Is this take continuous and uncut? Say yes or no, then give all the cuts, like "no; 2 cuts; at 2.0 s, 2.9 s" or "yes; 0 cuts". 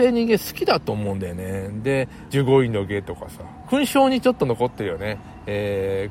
no; 2 cuts; at 2.3 s, 3.6 s